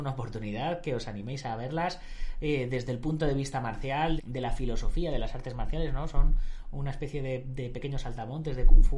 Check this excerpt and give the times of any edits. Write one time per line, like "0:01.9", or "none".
0:04.2